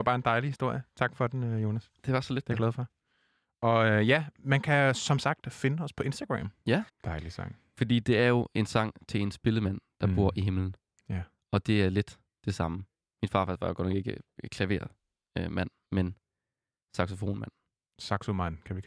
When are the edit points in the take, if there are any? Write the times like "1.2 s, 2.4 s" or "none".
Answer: 6.9 s